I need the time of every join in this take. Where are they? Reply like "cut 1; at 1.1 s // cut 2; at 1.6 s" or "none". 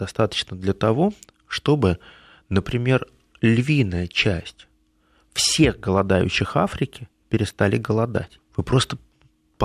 cut 1; at 8.4 s